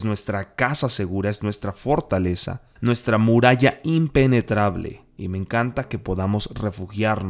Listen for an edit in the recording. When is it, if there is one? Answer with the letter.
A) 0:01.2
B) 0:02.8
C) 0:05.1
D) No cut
B